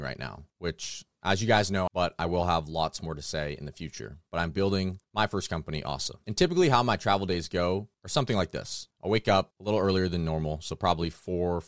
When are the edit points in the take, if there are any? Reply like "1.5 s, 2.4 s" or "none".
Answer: 1.9 s

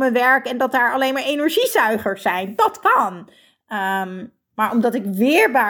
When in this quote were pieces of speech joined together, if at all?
none

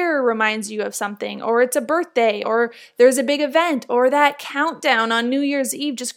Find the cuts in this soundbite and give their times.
none

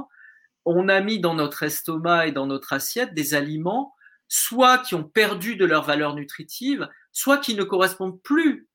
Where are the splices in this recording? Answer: none

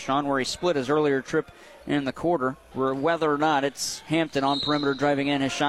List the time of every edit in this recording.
2.7 s

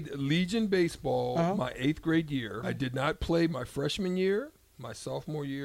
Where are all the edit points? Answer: 2.6 s

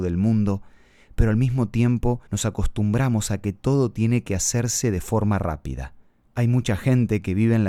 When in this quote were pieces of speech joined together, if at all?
2.3 s

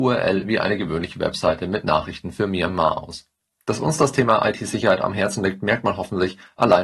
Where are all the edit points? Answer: 3.6 s

